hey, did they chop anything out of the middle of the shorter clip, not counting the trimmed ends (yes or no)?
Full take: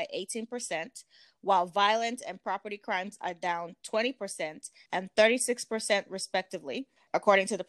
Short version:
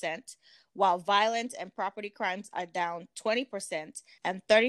no